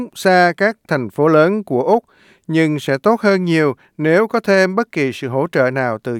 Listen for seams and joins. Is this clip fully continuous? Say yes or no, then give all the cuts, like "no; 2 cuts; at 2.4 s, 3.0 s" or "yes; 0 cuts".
yes; 0 cuts